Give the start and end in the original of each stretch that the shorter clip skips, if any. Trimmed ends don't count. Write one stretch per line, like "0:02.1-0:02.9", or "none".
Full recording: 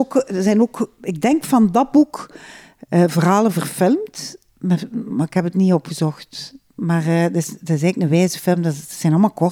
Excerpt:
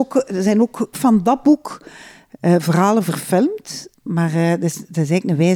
0:00.9-0:01.4
0:04.4-0:06.7